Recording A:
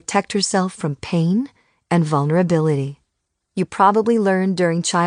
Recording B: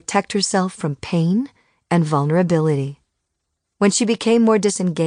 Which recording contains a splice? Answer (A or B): A